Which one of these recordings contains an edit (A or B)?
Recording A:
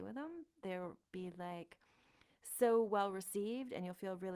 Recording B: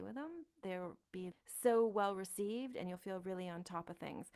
B